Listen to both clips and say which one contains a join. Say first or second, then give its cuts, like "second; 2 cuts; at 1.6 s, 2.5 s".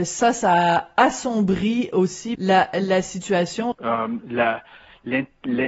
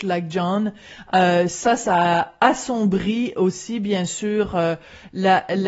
first; 2 cuts; at 2.3 s, 3.7 s